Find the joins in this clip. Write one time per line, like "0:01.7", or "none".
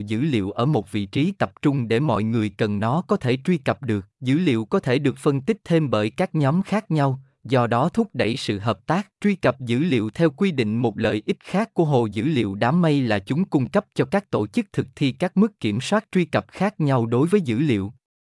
0:04.1
0:09.2